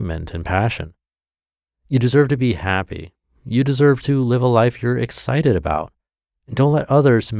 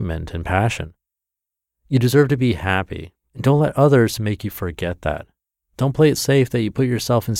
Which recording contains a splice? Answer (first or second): second